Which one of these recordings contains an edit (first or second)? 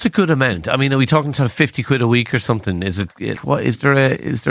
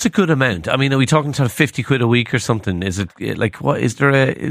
first